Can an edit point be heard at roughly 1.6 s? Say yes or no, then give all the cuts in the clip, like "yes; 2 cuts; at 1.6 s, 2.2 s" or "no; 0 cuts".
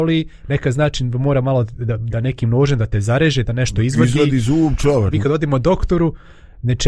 no; 1 cut; at 5.1 s